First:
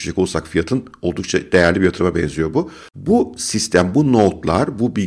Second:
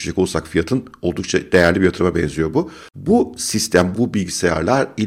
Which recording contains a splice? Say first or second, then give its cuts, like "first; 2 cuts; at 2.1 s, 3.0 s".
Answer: second; 1 cut; at 3.9 s